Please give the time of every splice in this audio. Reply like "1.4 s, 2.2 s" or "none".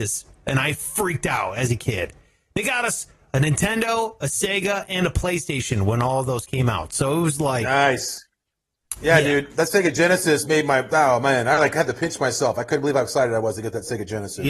none